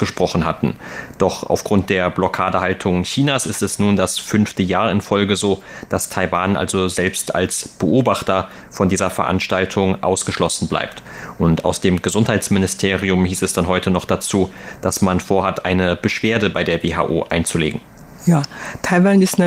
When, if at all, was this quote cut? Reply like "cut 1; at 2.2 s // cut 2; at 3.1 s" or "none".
none